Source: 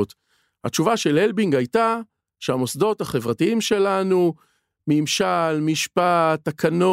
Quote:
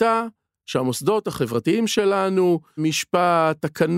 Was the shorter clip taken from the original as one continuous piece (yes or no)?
no